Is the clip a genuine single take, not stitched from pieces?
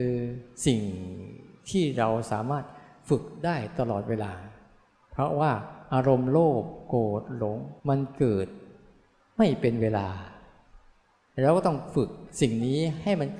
no; 1 cut; at 7.8 s

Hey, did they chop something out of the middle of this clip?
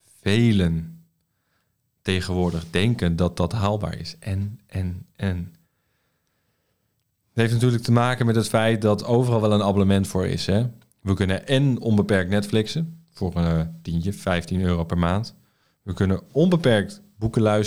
no; 0 cuts

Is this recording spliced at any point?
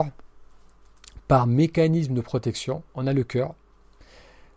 yes; 1 cut; at 2.9 s

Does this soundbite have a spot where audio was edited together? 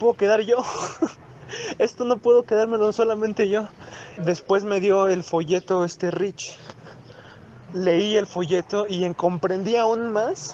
yes; 2 cuts; at 4.2 s, 7.7 s

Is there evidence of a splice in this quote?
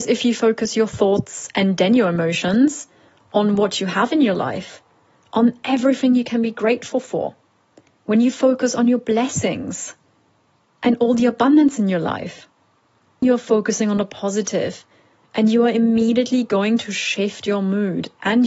yes; 1 cut; at 13.2 s

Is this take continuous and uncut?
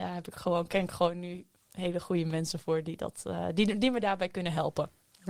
yes; 0 cuts

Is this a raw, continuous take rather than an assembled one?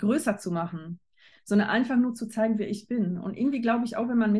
yes; 0 cuts

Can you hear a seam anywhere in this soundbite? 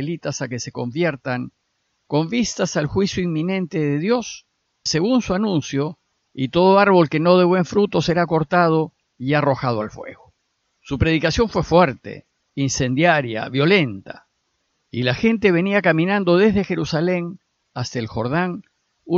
yes; 3 cuts; at 4.9 s, 6.2 s, 10.8 s

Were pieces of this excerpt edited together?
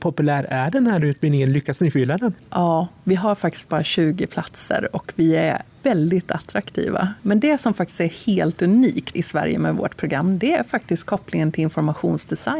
yes; 2 cuts; at 7.2 s, 9.1 s

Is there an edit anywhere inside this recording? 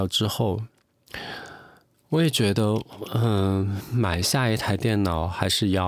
no; 0 cuts

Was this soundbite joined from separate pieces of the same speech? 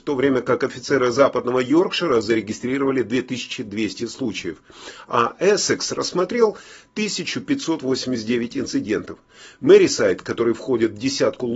no; 0 cuts

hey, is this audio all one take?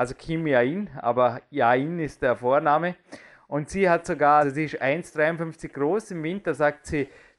no; 1 cut; at 4.4 s

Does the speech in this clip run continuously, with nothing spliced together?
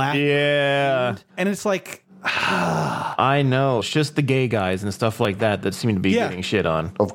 no; 2 cuts; at 1.3 s, 3.8 s

